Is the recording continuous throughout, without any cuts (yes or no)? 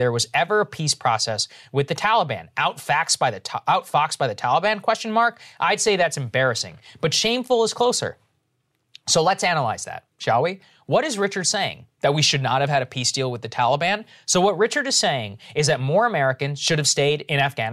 yes